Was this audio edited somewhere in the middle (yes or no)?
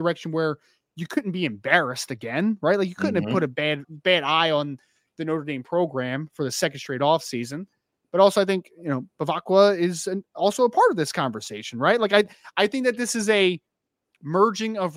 yes